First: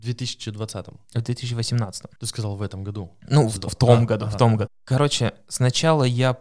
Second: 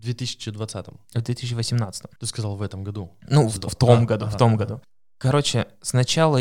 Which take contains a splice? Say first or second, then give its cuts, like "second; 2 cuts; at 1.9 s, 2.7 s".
first; 1 cut; at 4.7 s